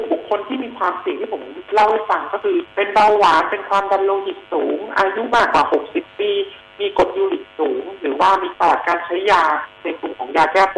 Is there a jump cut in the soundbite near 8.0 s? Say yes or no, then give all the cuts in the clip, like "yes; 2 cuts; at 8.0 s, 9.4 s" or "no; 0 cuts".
no; 1 cut; at 2.7 s